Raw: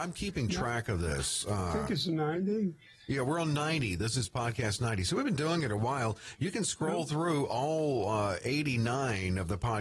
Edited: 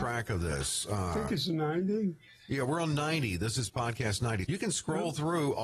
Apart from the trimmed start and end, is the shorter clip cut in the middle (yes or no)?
yes